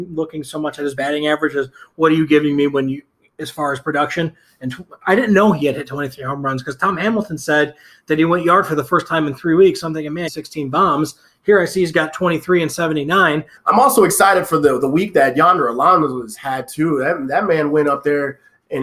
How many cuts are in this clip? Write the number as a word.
two